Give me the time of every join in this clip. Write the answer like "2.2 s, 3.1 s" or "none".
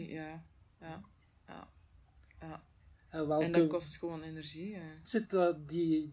5.0 s